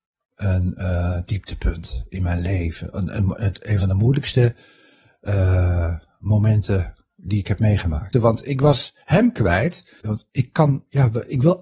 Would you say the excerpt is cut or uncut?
cut